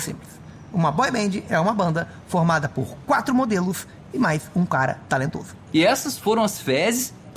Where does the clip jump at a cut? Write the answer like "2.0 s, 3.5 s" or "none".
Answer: 5.7 s